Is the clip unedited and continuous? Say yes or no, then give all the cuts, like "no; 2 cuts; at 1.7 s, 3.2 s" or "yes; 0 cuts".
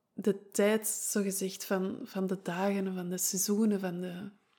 yes; 0 cuts